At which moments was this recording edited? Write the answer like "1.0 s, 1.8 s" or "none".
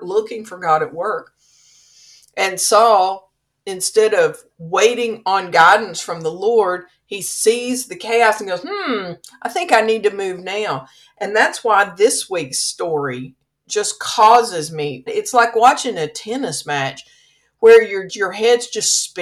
15.1 s, 18.1 s